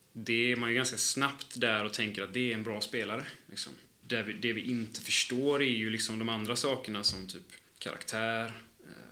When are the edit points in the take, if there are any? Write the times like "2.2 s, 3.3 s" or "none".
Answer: 4.0 s, 7.7 s